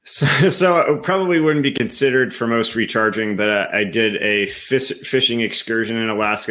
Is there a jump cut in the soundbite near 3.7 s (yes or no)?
no